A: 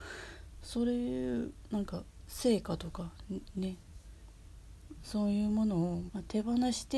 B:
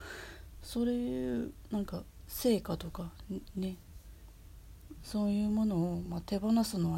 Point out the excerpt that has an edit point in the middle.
A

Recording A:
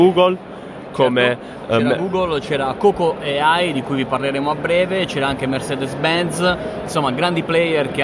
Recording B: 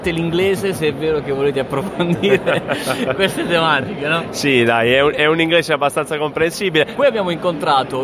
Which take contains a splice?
B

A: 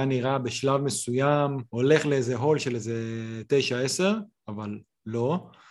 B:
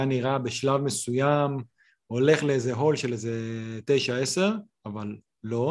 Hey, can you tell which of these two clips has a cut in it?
A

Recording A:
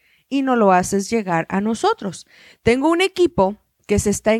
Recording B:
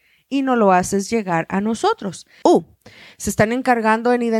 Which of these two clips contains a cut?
B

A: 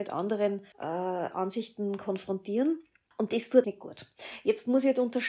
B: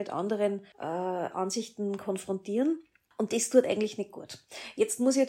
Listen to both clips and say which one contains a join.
A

